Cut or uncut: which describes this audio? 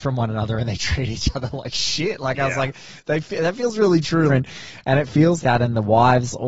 cut